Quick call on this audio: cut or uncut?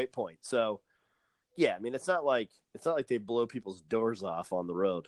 uncut